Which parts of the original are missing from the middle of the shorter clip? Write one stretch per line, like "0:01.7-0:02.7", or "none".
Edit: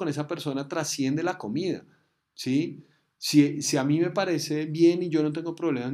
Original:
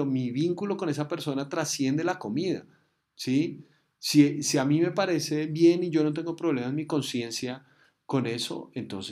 none